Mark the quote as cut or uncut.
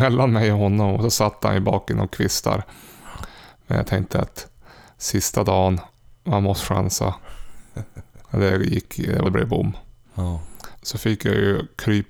cut